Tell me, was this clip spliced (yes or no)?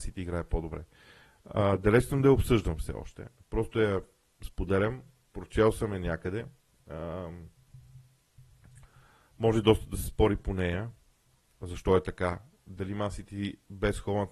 no